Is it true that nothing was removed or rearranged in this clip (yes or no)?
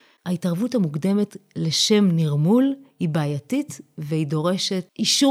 yes